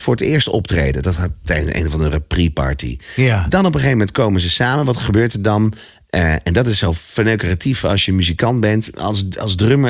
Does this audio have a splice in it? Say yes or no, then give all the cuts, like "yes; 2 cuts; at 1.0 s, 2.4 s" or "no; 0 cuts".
no; 0 cuts